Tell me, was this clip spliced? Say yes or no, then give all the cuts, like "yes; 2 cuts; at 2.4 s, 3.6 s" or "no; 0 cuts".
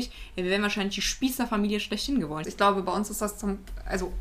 yes; 1 cut; at 2.4 s